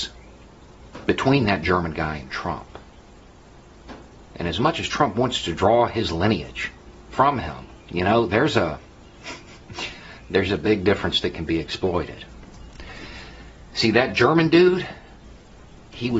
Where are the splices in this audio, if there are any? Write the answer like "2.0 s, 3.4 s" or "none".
7.8 s